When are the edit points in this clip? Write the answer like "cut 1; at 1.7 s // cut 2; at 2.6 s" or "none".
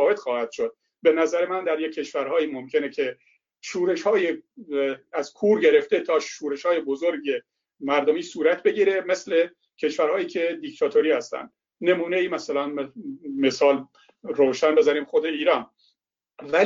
none